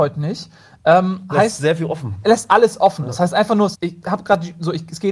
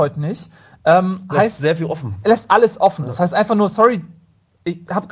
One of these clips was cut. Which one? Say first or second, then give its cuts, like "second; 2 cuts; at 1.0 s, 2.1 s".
first; 1 cut; at 3.7 s